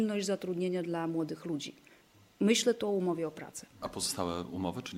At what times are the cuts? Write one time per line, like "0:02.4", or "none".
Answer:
none